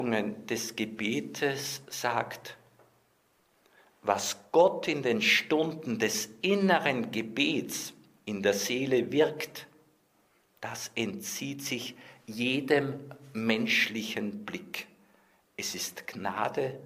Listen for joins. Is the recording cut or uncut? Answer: uncut